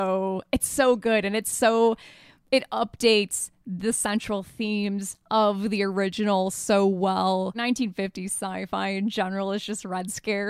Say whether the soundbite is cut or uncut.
uncut